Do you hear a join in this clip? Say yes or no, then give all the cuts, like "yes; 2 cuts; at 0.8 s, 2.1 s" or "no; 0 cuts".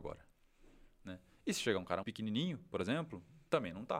yes; 1 cut; at 2.0 s